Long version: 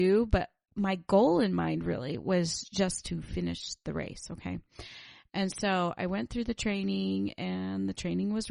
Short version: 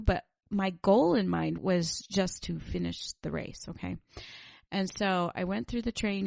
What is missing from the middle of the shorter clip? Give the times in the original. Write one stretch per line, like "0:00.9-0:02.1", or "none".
0:01.8-0:02.2